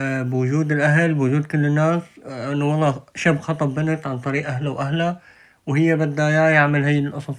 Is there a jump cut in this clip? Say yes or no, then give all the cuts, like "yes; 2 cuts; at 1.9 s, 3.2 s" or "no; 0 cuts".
no; 0 cuts